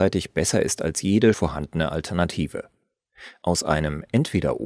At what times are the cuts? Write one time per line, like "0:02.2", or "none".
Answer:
0:01.3